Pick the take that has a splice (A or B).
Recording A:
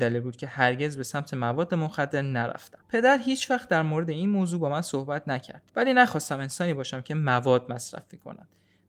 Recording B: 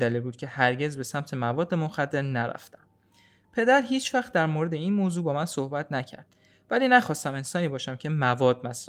A